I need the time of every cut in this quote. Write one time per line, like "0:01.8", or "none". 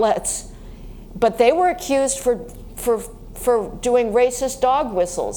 none